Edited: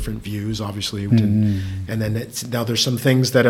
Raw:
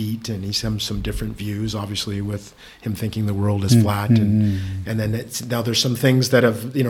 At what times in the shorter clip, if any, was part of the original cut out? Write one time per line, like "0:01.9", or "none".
0:01.1